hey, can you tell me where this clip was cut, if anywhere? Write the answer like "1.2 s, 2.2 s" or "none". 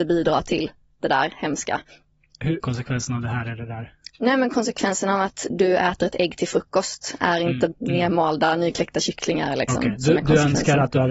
2.6 s, 7.7 s